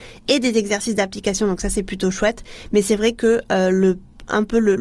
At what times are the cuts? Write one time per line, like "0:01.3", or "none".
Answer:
none